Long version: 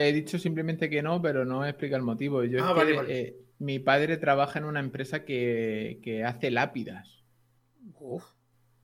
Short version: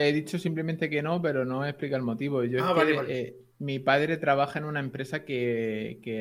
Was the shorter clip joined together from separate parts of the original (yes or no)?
no